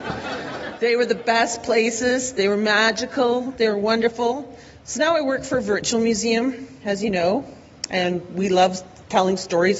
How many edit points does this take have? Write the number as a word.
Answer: zero